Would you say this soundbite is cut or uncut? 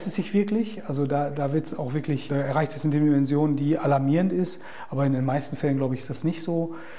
cut